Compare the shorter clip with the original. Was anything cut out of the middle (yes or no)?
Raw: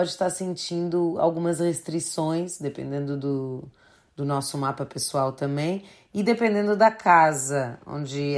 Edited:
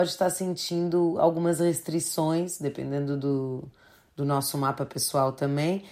no